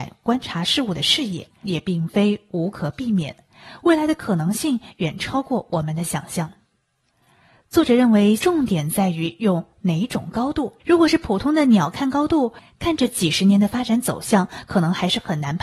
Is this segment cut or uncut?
cut